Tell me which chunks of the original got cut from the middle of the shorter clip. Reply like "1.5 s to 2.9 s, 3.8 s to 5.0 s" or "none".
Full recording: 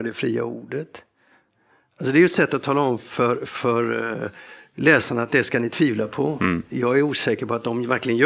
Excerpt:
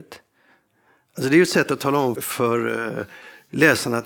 3.0 s to 3.4 s